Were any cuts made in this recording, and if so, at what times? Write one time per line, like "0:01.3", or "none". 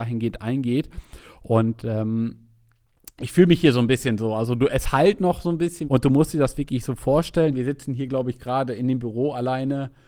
0:05.8
0:07.5